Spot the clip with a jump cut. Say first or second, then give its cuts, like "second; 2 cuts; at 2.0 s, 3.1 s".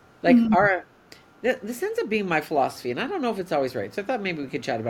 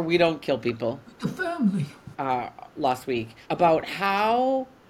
second; 2 cuts; at 2.1 s, 3.4 s